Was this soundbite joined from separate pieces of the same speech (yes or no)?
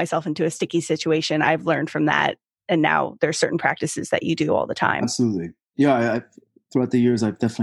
no